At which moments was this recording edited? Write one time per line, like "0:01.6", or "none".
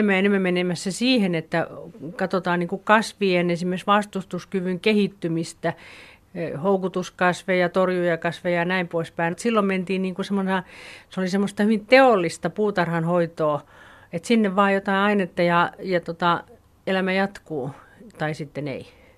0:09.3